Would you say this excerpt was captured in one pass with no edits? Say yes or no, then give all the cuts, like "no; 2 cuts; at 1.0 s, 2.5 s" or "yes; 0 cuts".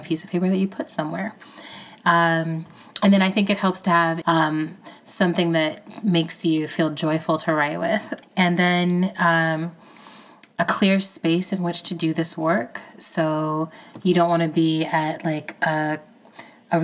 no; 2 cuts; at 4.2 s, 8.2 s